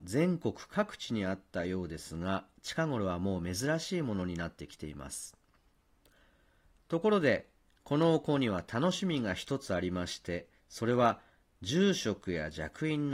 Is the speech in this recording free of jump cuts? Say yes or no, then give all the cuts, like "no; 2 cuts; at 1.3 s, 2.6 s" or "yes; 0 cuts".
yes; 0 cuts